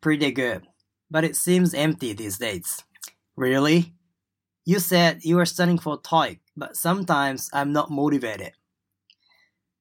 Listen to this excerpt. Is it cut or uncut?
cut